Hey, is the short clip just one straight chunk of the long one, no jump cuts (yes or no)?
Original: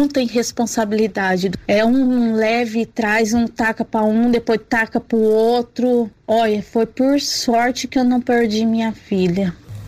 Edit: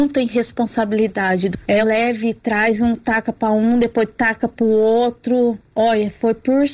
no